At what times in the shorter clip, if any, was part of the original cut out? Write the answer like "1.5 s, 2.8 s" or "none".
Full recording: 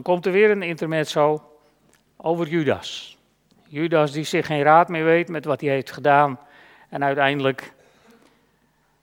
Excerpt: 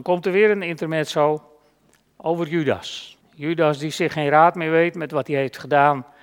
3.2 s